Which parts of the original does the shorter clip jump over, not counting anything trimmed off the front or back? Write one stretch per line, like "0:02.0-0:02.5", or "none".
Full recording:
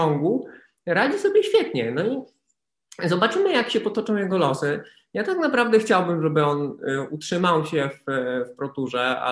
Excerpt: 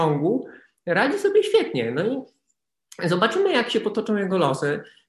none